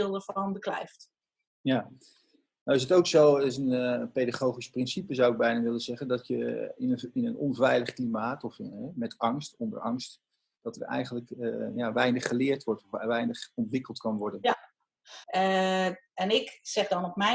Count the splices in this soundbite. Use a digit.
2